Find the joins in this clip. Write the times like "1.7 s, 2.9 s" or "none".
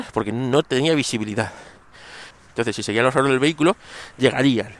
2.3 s